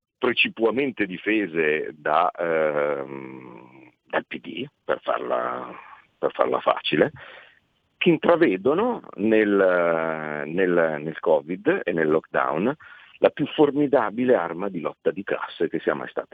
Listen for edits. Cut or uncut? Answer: uncut